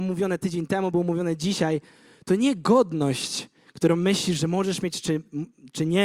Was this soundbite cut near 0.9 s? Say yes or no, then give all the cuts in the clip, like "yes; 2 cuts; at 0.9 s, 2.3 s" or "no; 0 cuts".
no; 0 cuts